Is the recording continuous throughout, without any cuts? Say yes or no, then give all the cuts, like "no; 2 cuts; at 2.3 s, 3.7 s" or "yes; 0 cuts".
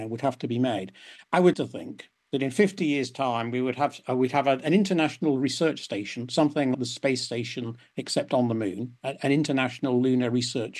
no; 2 cuts; at 1.5 s, 6.7 s